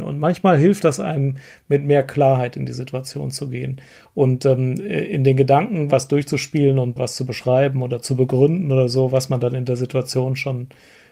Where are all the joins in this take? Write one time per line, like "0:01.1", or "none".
0:07.0

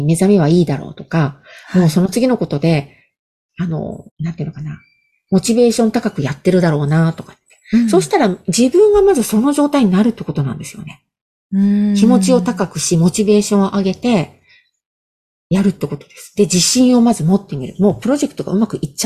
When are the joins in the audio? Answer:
0:04.1

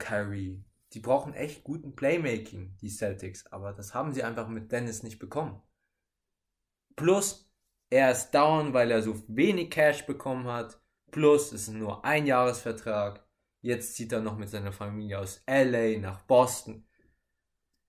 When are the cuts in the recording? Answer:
none

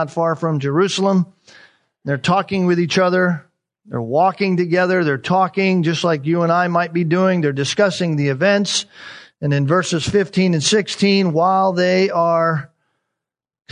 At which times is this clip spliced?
none

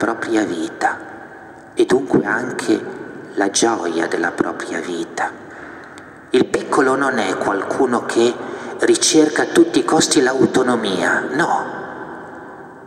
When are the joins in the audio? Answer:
none

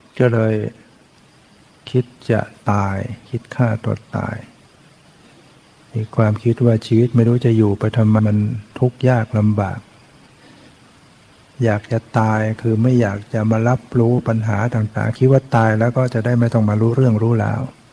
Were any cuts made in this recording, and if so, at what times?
0:08.2

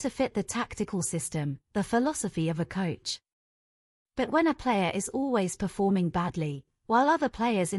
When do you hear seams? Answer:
none

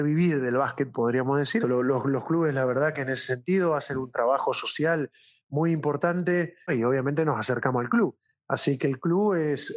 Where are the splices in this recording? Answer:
0:01.6
0:06.6

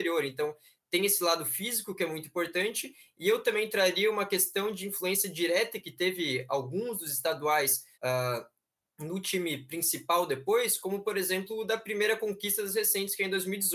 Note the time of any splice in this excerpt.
0:07.9

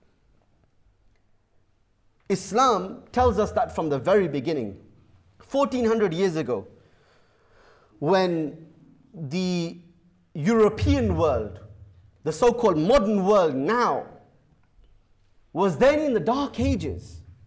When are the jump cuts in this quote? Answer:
none

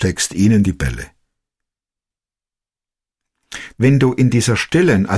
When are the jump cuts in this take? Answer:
0:03.7

